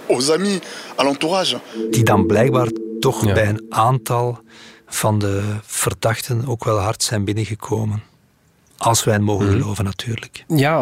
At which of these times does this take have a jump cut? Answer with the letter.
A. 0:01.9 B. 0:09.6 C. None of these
C